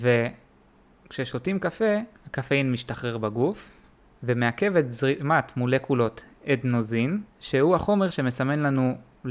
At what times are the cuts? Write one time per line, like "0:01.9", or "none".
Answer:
0:02.2
0:07.3